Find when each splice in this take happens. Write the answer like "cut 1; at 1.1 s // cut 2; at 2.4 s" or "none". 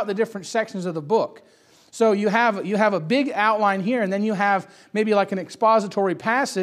none